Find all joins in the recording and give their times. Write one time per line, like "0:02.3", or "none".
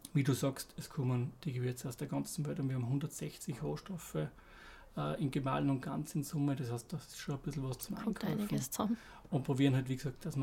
none